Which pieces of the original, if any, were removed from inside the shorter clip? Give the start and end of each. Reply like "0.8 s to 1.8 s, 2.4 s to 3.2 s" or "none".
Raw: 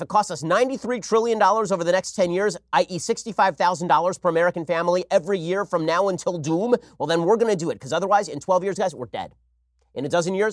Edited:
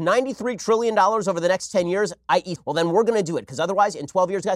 3.0 s to 6.9 s